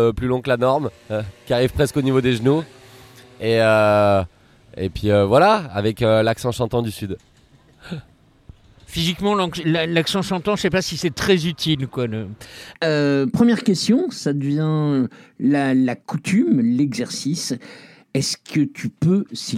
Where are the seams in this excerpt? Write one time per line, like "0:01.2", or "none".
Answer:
0:12.7